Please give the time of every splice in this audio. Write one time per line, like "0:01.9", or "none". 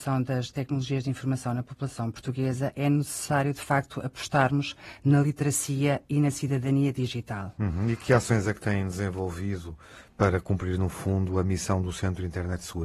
none